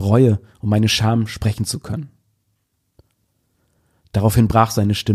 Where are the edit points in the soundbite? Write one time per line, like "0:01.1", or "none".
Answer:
none